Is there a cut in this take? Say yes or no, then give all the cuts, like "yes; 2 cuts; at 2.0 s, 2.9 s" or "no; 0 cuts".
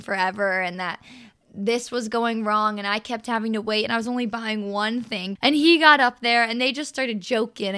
yes; 1 cut; at 5.4 s